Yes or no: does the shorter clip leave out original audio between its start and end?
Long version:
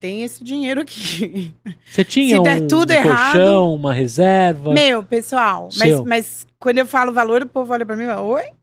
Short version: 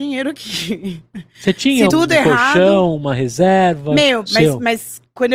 yes